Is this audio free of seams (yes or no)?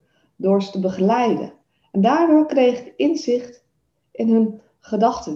yes